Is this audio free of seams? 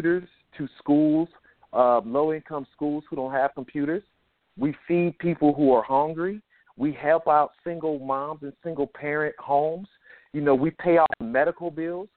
yes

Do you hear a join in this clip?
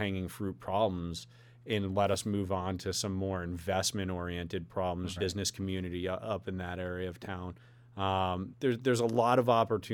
yes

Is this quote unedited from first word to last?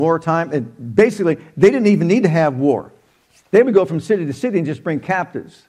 yes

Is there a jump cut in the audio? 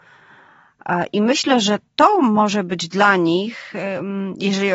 no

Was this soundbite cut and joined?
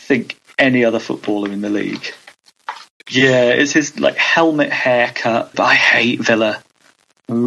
yes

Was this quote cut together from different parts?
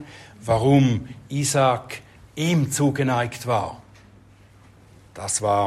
no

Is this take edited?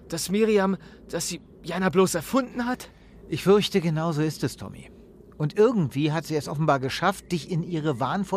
no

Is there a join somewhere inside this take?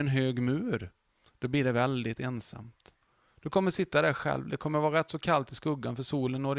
no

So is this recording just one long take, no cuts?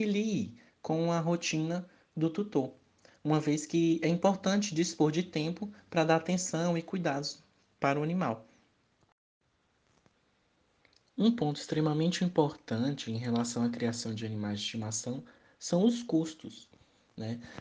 yes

